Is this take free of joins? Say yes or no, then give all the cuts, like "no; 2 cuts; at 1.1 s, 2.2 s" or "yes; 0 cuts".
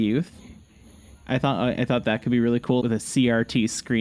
no; 1 cut; at 2.8 s